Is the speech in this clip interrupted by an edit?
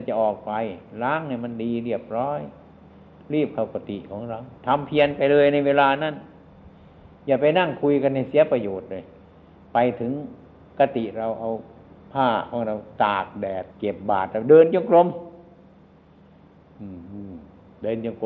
yes; 2 cuts; at 4.6 s, 13.7 s

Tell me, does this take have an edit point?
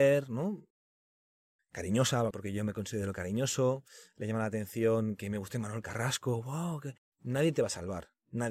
yes; 1 cut; at 7.1 s

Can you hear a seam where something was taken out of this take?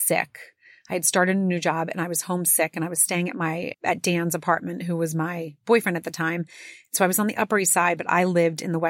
yes; 1 cut; at 3.7 s

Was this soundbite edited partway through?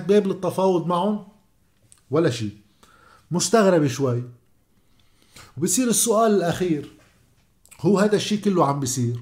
no; 0 cuts

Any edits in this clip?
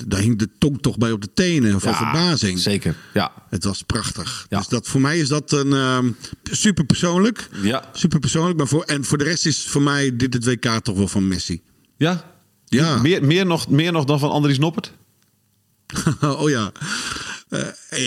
no; 0 cuts

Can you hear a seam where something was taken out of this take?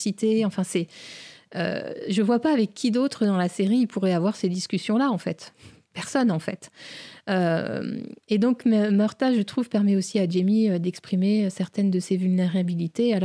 no; 0 cuts

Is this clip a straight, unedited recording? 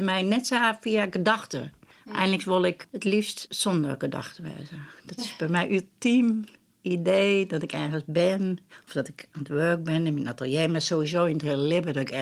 yes; 0 cuts

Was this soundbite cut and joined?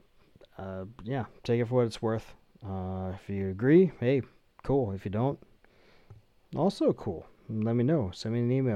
no; 0 cuts

